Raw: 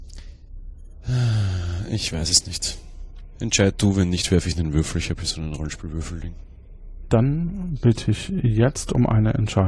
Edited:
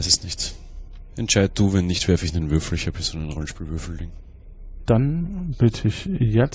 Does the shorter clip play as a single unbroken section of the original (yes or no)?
yes